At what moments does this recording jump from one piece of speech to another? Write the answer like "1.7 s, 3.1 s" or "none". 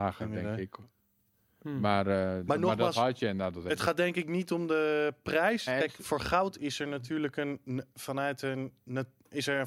5.7 s